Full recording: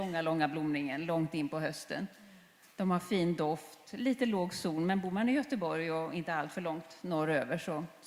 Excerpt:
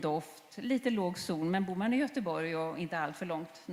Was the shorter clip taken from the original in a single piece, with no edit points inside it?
yes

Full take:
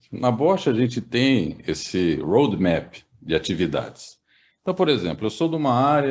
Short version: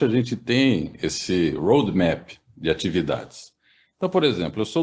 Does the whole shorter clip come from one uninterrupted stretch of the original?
yes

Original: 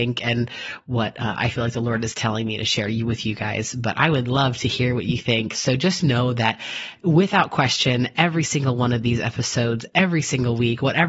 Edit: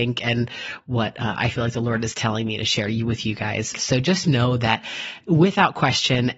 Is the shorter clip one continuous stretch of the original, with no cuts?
no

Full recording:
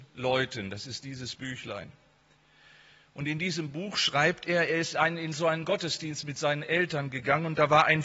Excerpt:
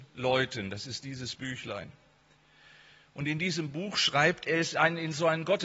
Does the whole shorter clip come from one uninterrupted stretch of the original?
no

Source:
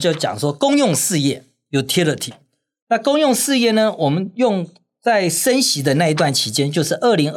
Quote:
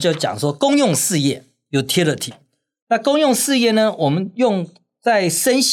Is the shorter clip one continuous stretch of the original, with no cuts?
yes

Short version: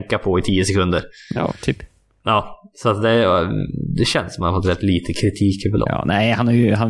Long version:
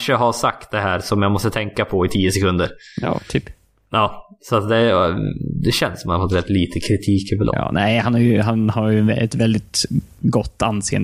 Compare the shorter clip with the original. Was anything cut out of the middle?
no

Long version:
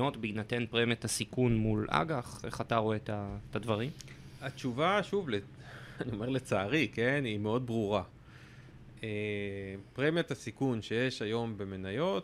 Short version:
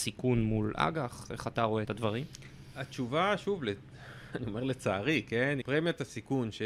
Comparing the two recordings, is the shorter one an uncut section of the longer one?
no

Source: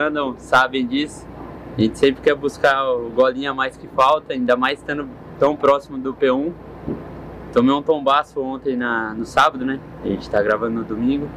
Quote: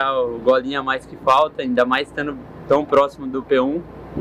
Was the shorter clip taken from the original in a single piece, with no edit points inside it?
yes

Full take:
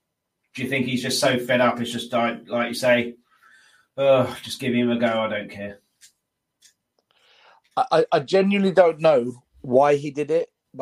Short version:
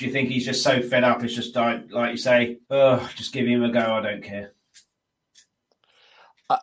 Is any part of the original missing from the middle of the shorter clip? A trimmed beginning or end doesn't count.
yes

